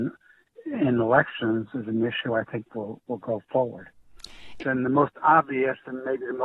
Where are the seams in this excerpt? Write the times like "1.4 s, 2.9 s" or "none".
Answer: 4.6 s